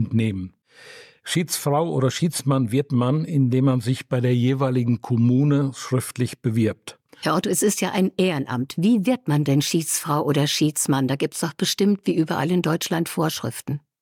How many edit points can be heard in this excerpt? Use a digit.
1